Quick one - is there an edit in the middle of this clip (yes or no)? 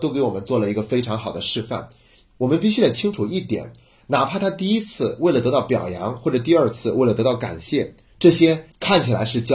no